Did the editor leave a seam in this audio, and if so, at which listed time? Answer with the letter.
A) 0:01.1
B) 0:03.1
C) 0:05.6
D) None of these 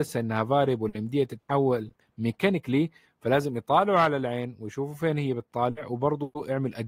D